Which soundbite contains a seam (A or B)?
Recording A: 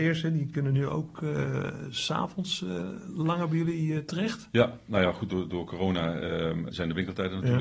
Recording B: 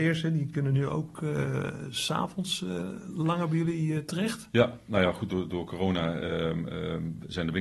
A